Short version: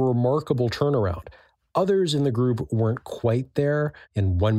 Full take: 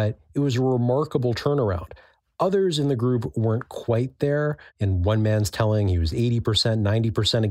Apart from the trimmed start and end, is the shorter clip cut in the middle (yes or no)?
no